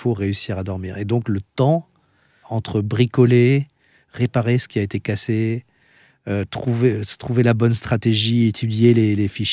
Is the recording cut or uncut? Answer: cut